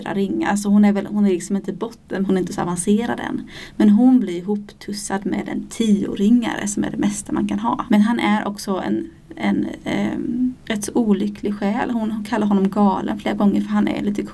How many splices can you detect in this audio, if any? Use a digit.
2